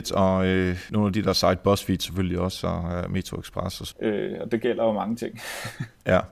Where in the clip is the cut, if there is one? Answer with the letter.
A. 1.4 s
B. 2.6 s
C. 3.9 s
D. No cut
C